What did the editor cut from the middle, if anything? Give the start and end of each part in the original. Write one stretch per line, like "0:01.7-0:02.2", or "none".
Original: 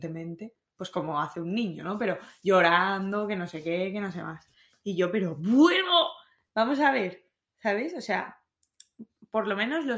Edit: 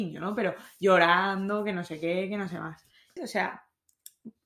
0:04.8-0:07.9

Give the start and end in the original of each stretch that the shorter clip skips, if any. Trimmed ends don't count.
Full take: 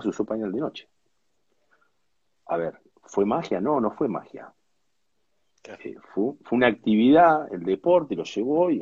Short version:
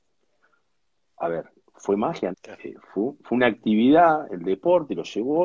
0:03.6-0:05.5

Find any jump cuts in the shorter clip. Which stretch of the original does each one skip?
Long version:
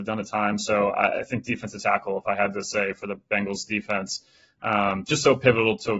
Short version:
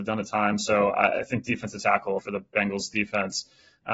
0:02.2-0:02.9

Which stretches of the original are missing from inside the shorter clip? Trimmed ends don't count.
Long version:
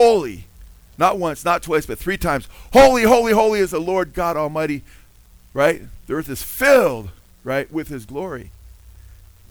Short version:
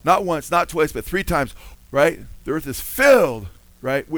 0:02.7-0:05.4

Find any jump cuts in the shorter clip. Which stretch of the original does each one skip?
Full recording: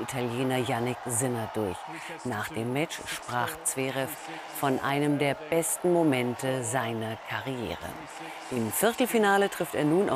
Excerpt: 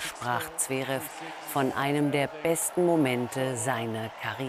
none

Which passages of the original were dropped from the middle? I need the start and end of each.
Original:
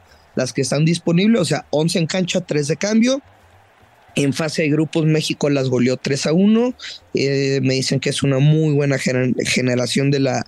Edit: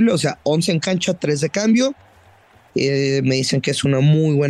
0:04.0-0:07.1

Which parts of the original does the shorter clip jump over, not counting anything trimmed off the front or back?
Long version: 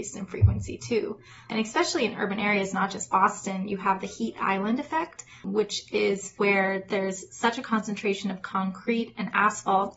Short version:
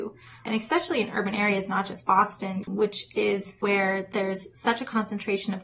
0:03.7-0:05.4

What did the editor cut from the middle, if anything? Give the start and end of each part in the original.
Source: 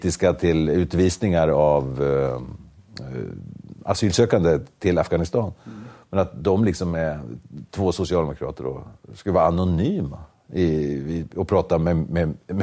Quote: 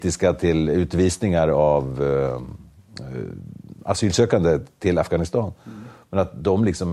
none

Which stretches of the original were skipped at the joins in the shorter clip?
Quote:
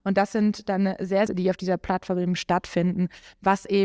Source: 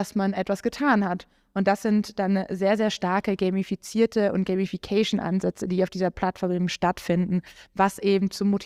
0:02.8-0:05.6

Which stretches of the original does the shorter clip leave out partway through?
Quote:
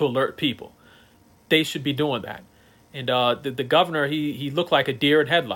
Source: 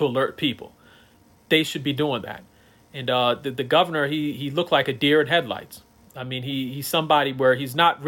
none

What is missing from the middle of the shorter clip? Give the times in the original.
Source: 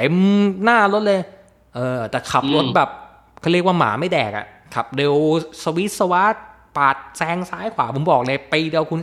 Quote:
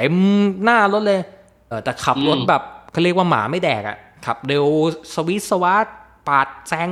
0:01.7-0:02.0
0:03.1-0:03.4

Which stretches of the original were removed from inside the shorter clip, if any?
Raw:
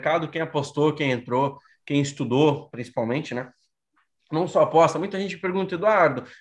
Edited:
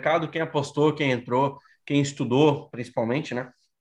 none

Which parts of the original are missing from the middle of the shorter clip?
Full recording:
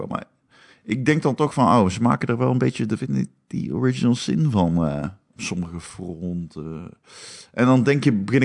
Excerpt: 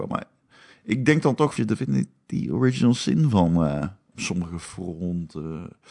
0:01.6-0:02.8

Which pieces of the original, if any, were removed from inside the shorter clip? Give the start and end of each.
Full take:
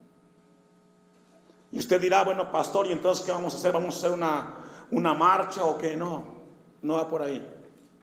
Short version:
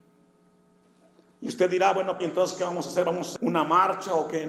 0:02.5-0:02.9
0:04.0-0:04.9

